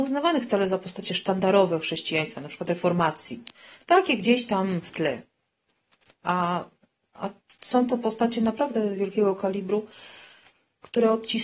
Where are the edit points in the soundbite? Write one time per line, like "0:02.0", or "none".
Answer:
none